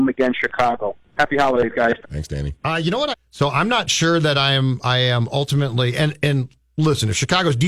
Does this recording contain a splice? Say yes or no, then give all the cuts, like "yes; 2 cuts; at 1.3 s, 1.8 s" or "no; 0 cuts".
yes; 2 cuts; at 2.0 s, 3.1 s